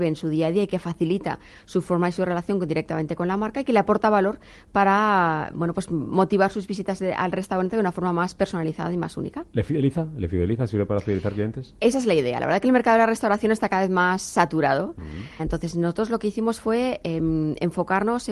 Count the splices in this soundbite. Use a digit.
1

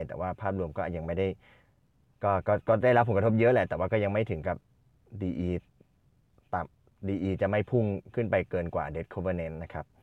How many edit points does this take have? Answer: 0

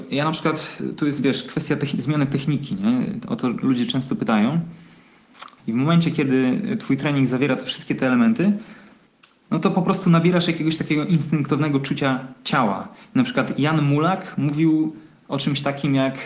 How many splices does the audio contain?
1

